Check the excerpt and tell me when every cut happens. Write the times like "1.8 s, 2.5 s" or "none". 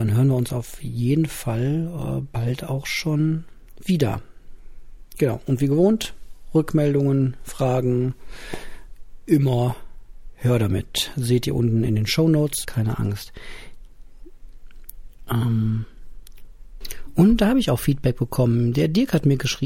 12.6 s